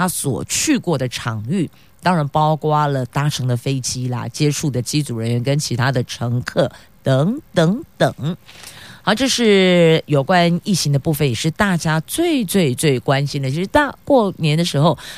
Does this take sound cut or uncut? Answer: uncut